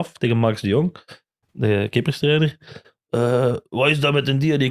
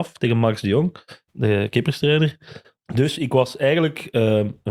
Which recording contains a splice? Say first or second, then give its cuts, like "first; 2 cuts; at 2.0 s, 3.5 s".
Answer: second; 2 cuts; at 1.3 s, 2.8 s